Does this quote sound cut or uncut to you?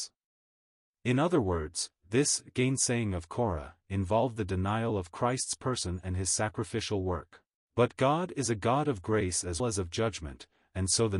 cut